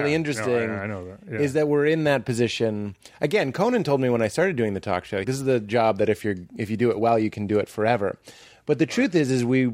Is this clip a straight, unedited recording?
no; 1 cut; at 5.2 s

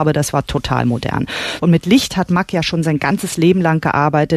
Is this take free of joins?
no; 1 cut; at 1.6 s

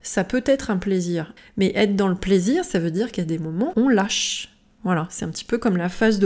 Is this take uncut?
no; 2 cuts; at 1.4 s, 3.7 s

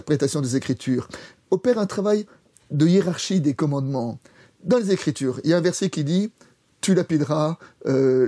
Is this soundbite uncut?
yes; 0 cuts

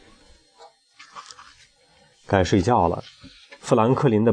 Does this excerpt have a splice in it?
no; 0 cuts

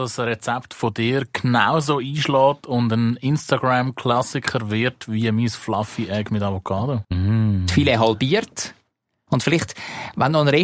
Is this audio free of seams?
no; 2 cuts; at 7.0 s, 9.3 s

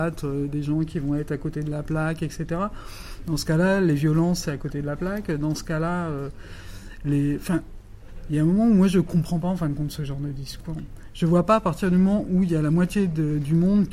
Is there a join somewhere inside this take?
no; 0 cuts

